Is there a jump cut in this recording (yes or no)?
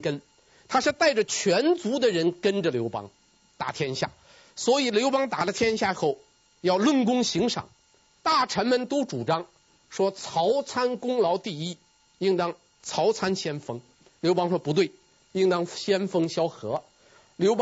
no